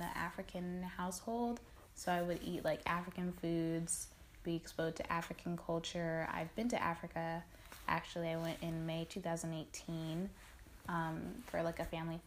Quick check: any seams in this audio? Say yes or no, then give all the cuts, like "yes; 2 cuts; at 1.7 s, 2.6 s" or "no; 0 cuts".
no; 0 cuts